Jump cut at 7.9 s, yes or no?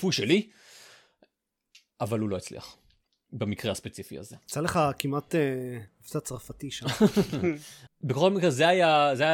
yes